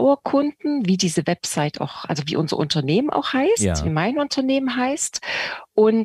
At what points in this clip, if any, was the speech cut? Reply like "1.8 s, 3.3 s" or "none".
none

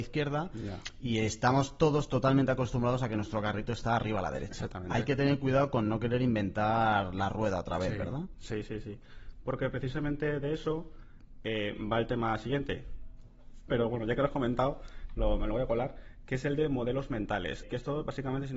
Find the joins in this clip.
13.7 s, 17.6 s

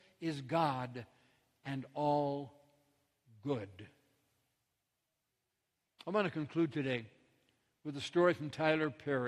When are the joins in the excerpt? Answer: none

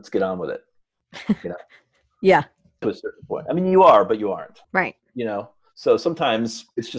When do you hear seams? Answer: 2.8 s, 4.6 s

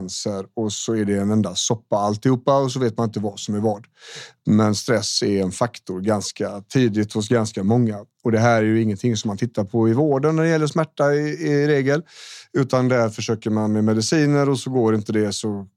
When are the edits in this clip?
none

